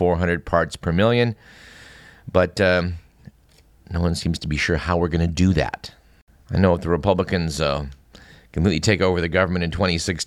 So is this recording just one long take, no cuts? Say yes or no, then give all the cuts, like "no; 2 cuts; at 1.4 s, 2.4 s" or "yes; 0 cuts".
yes; 0 cuts